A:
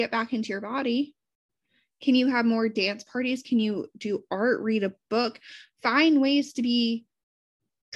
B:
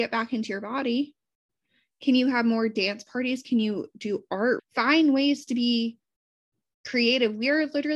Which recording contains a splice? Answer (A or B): B